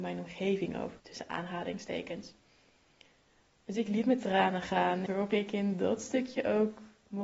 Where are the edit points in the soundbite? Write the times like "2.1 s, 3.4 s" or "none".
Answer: 1.0 s, 5.1 s